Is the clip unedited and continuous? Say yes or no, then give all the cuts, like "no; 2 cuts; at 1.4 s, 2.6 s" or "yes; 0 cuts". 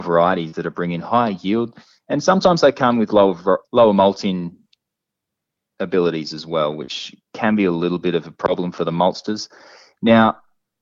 no; 1 cut; at 3.6 s